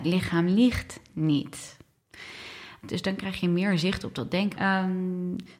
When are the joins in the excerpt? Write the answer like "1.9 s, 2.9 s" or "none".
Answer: 2.8 s, 4.5 s